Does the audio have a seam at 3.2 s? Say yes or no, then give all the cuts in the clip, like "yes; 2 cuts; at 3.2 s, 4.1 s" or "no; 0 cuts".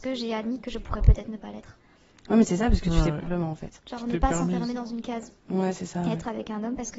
yes; 1 cut; at 3.2 s